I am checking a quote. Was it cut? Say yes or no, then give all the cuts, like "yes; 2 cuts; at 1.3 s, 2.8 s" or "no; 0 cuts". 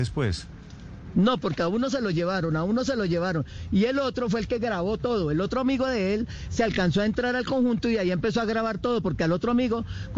no; 0 cuts